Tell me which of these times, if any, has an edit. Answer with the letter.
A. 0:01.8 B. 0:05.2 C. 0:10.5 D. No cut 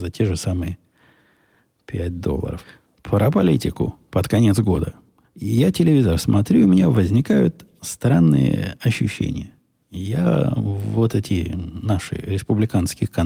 B